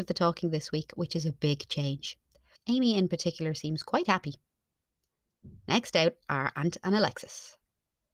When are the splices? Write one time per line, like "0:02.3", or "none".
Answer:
0:02.5